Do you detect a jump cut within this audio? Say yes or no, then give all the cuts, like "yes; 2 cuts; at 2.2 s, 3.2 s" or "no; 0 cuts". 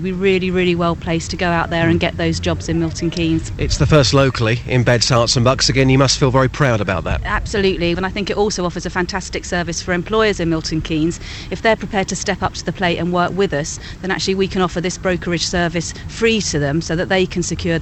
yes; 1 cut; at 7.9 s